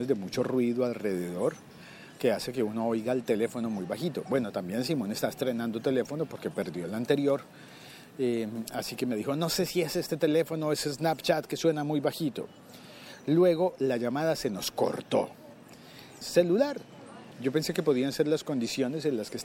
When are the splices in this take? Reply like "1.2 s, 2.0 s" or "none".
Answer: 16.2 s, 17.3 s